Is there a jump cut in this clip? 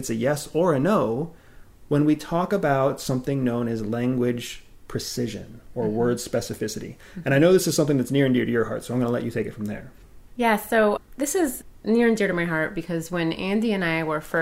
no; 0 cuts

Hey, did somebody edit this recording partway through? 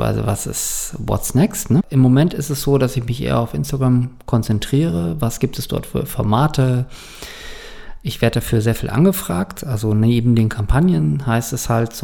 yes; 1 cut; at 1.8 s

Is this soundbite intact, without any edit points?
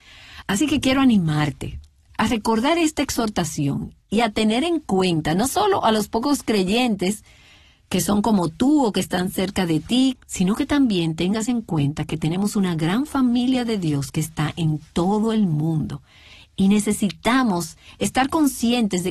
no; 1 cut; at 10.2 s

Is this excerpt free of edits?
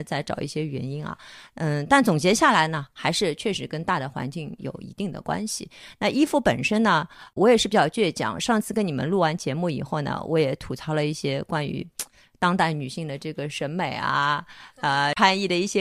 yes; 0 cuts

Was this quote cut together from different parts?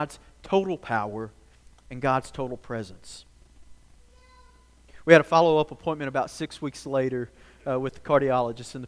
no; 0 cuts

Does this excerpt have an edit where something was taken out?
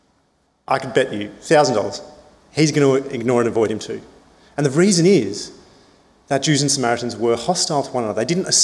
no; 0 cuts

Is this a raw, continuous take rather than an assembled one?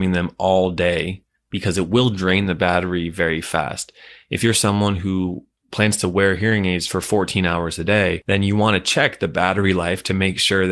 yes; 0 cuts

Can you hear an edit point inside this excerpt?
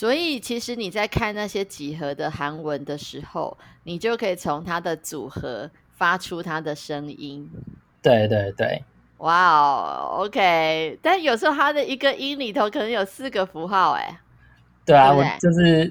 no; 0 cuts

